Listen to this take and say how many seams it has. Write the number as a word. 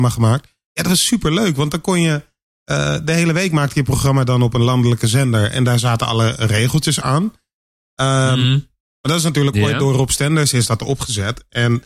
one